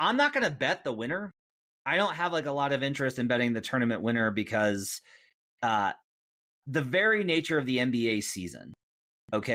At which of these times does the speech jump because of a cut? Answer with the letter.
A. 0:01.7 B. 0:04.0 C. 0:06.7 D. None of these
D